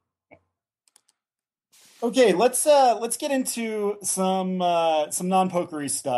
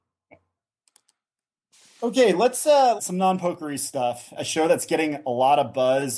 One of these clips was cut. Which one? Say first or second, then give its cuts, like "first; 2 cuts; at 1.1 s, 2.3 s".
second; 2 cuts; at 3.0 s, 4.4 s